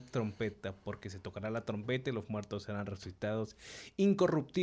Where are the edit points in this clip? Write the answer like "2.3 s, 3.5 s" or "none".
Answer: none